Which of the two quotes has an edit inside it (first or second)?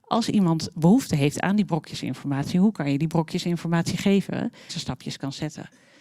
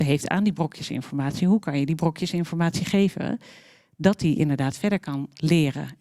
first